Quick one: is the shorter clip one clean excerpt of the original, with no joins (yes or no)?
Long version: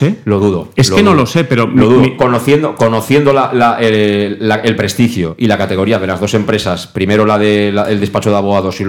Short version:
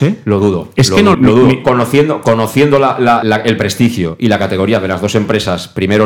no